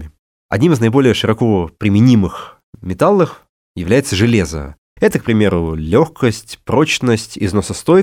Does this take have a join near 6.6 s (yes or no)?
no